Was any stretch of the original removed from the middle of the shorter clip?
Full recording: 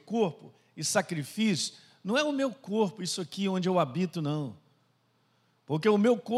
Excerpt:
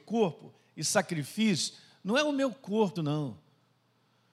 yes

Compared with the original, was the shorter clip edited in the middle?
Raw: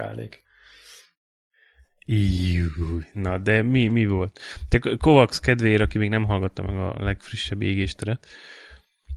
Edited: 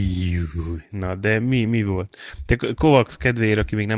no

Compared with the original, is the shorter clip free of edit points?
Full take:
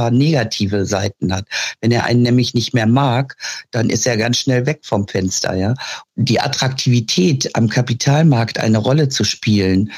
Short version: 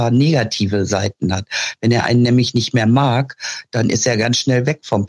yes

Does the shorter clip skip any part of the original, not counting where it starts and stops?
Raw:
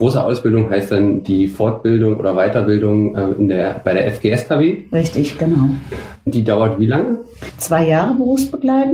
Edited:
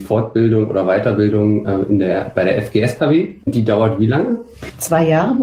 yes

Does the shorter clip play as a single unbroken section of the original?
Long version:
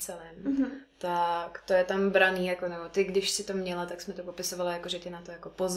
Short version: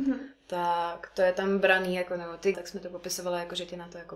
no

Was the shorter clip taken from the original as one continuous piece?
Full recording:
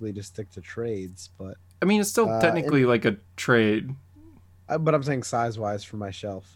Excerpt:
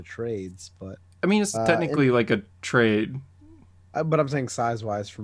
no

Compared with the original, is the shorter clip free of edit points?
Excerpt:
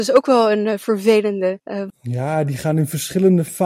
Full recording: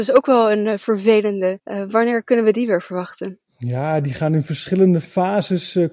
no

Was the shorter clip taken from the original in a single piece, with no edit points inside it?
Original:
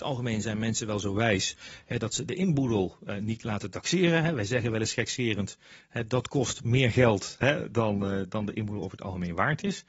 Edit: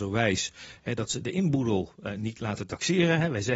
yes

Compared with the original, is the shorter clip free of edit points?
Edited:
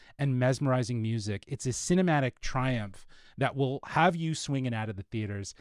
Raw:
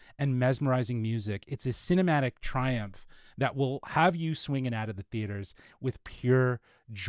yes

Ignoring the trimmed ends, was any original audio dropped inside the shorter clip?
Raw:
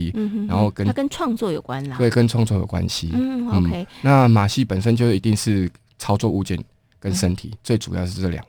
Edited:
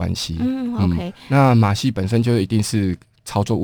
no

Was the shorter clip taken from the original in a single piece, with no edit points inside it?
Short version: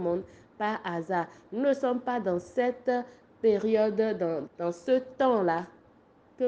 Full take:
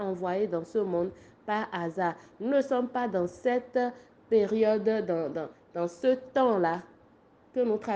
no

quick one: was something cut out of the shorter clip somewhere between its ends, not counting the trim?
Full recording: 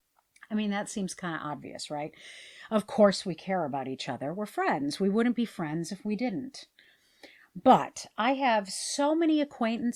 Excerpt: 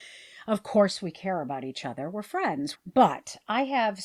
yes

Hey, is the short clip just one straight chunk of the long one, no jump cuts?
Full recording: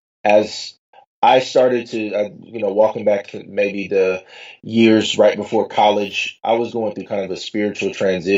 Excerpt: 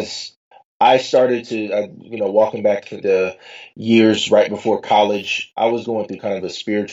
no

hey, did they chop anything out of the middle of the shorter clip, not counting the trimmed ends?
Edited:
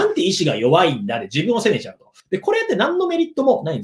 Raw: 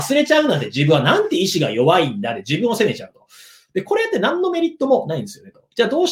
yes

